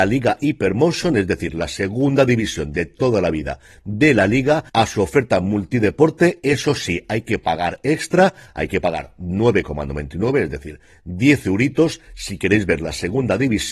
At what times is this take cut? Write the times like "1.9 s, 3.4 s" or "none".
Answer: none